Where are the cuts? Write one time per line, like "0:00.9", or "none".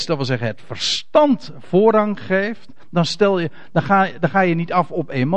none